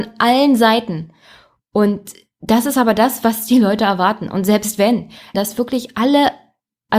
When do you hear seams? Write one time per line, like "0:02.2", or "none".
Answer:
0:05.3